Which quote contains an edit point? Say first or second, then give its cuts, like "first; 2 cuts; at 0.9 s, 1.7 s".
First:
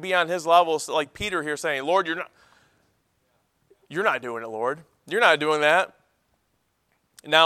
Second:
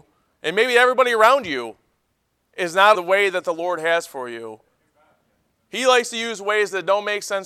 second; 1 cut; at 2.9 s